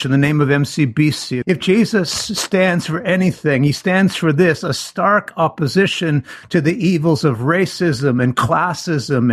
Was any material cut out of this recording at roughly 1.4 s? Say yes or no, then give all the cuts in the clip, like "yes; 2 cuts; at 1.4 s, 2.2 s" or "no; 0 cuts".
yes; 1 cut; at 1.4 s